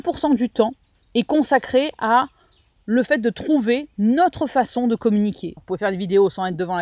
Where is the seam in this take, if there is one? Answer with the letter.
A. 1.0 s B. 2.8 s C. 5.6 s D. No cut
C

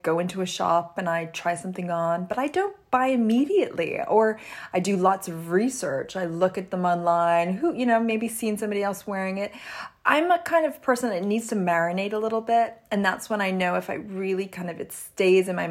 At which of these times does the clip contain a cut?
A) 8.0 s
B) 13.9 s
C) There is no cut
C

